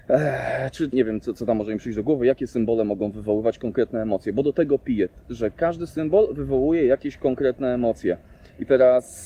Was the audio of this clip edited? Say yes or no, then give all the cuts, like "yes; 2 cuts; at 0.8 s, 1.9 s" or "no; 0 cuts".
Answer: yes; 1 cut; at 0.9 s